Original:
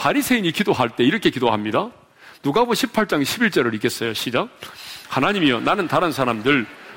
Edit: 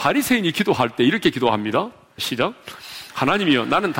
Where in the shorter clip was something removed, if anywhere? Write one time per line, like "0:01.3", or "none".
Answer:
0:02.2